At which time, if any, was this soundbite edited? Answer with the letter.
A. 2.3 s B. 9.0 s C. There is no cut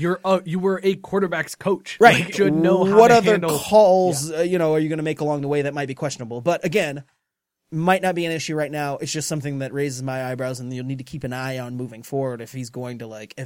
A